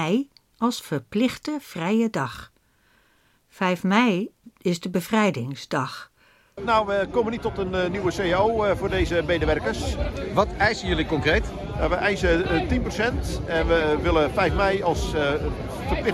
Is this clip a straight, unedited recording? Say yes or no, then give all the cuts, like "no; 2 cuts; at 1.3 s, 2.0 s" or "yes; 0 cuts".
no; 1 cut; at 6.6 s